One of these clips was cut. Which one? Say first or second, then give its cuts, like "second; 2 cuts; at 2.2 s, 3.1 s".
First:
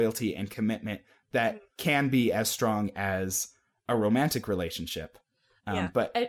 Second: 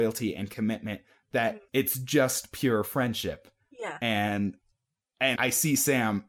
second; 2 cuts; at 1.7 s, 5.4 s